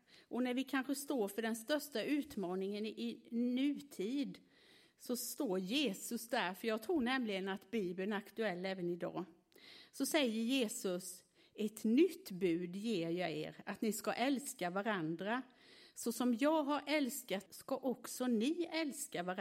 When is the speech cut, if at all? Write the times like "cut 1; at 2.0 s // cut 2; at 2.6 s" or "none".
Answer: cut 1; at 17.5 s